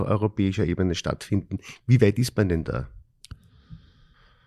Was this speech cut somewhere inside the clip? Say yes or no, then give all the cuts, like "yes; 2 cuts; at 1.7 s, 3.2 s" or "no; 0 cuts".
no; 0 cuts